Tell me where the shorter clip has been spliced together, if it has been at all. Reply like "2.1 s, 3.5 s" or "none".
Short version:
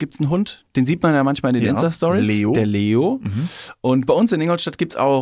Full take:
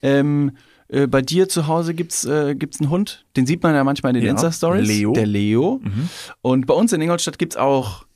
none